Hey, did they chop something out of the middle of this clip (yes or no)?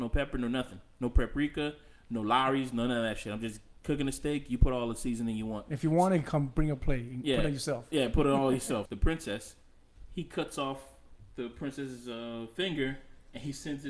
yes